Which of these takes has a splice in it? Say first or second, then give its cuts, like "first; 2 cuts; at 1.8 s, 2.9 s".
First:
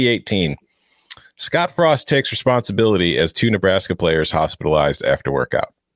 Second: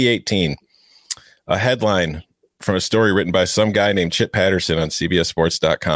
first; 1 cut; at 1.2 s